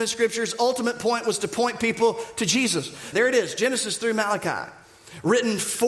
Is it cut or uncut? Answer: cut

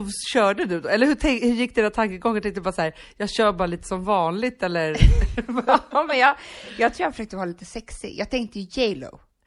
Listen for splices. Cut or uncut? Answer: uncut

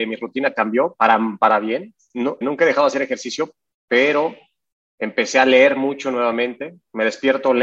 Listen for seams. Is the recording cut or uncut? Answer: cut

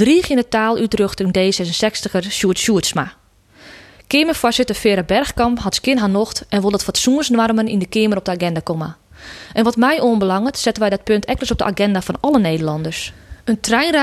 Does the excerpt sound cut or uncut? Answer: uncut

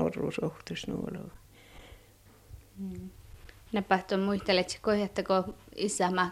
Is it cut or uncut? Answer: uncut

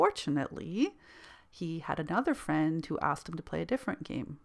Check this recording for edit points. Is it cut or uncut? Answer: uncut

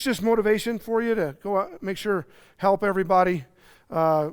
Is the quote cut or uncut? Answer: uncut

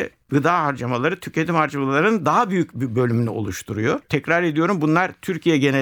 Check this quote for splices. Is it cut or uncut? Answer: cut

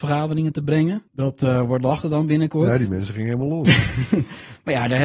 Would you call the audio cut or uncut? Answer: cut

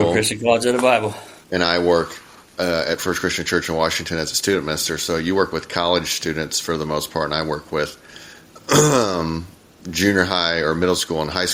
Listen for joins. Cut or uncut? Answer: cut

